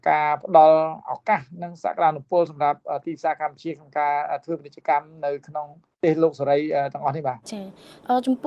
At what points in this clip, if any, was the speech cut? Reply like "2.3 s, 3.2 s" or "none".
7.4 s